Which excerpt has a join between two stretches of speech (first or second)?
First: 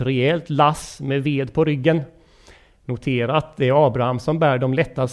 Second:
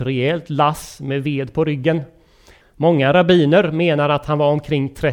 second